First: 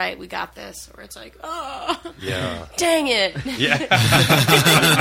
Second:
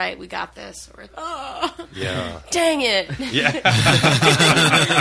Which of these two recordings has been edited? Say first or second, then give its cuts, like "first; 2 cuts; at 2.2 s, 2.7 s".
second; 1 cut; at 1.1 s